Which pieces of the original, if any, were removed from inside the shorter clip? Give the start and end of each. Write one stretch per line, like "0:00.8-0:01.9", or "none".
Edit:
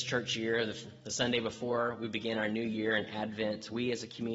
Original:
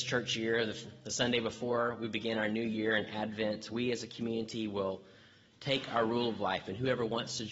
none